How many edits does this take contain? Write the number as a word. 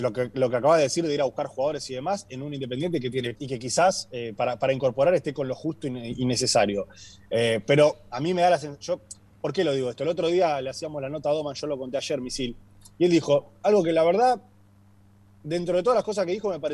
one